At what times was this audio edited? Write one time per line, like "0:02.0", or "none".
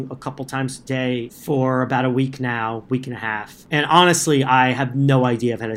none